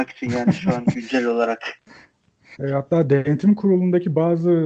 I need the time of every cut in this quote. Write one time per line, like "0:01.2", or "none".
0:02.6

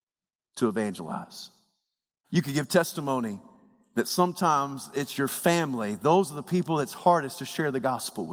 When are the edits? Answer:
0:02.2

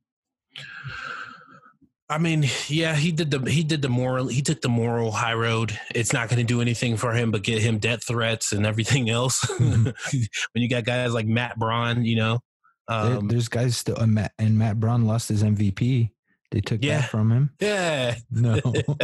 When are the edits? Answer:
0:10.0
0:17.6

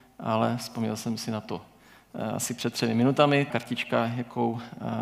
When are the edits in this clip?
0:03.5

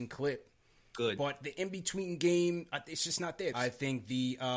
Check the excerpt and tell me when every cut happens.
0:03.5

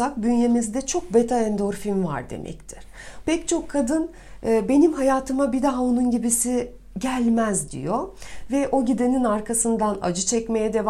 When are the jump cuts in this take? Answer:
0:03.2

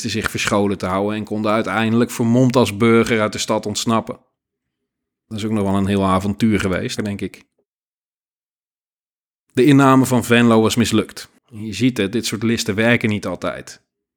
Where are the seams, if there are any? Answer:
0:07.0
0:11.4

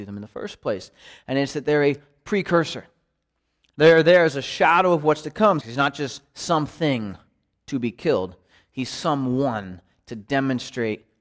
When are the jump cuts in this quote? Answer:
0:05.6

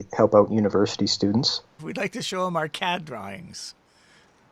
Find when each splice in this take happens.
0:01.8

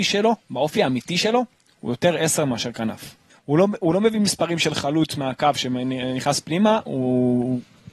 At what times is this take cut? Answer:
0:03.3

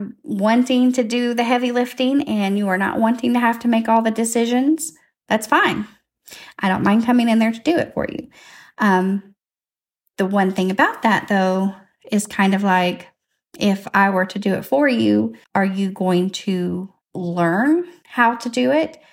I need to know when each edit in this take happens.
0:15.4
0:17.0

